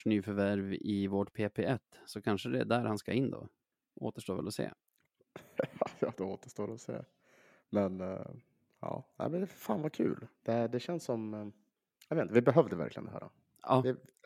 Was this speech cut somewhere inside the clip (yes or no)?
no